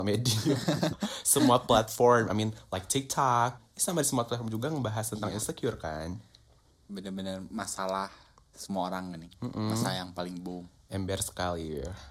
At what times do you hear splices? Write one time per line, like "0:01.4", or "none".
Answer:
0:03.6